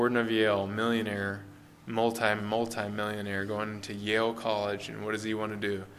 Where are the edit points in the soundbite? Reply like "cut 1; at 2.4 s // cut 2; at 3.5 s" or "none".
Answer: cut 1; at 2.4 s